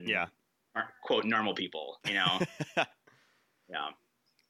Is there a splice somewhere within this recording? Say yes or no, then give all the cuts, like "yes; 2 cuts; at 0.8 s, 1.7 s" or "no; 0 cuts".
no; 0 cuts